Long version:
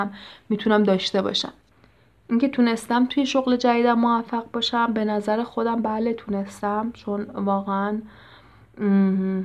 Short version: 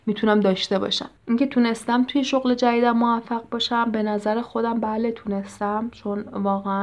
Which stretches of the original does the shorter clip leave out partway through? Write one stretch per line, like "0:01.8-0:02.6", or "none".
0:01.6-0:02.2

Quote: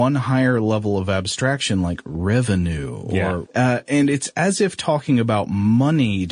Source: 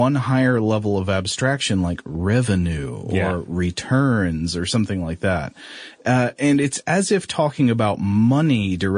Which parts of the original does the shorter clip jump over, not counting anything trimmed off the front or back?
0:03.5-0:06.0

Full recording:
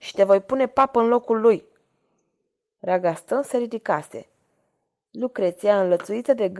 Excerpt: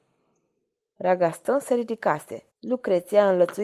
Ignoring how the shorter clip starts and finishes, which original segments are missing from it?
0:04.3-0:05.0

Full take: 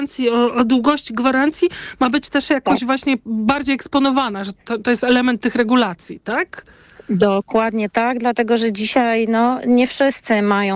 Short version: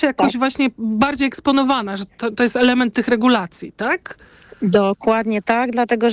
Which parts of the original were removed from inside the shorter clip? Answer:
none

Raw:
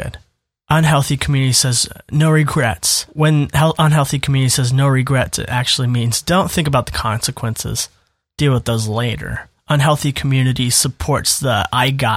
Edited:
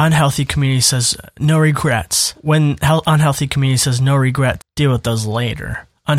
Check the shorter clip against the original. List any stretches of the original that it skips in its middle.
0:05.3-0:08.2

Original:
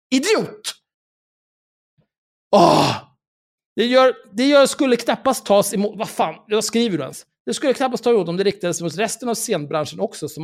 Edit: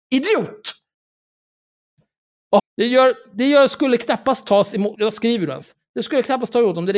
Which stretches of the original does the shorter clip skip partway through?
0:02.6-0:03.6
0:05.9-0:06.4

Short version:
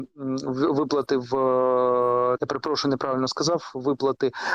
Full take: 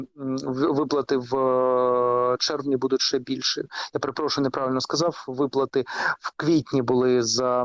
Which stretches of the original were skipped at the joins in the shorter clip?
0:02.4-0:03.9

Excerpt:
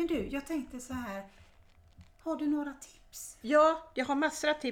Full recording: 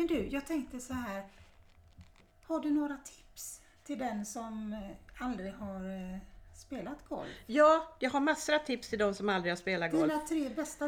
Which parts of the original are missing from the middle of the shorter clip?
0:02.1-0:02.4
0:03.6-0:07.4

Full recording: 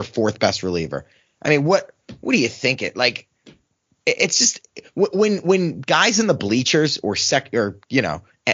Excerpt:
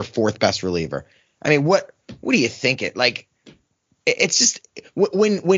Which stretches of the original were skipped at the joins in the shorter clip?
none

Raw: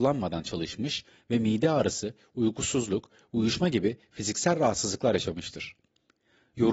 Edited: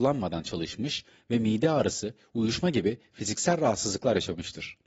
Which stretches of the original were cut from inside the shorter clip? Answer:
0:02.3-0:03.3

